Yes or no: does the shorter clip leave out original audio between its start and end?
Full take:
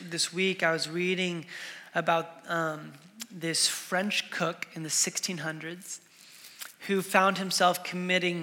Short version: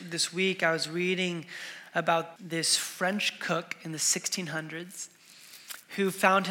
yes